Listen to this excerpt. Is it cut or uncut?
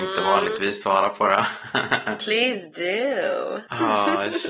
uncut